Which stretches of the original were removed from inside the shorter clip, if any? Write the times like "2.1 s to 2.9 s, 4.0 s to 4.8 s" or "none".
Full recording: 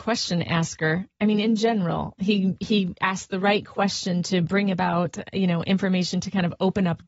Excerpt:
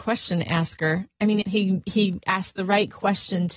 1.4 s to 2.2 s